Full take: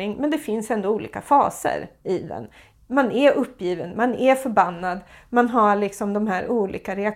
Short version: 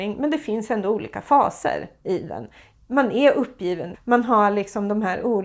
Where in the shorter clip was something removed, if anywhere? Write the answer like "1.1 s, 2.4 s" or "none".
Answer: 3.9 s